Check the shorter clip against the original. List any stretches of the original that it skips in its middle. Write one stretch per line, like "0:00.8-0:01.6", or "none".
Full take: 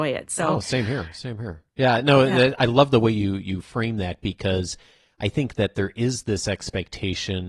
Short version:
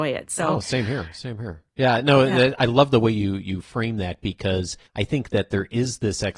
0:04.9-0:05.1